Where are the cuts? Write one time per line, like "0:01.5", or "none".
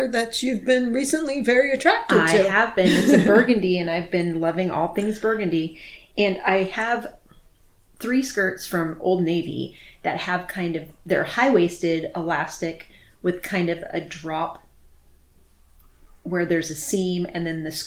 none